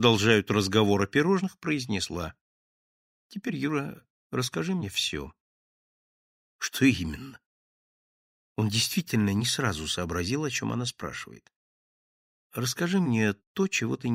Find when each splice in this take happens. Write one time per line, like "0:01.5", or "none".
none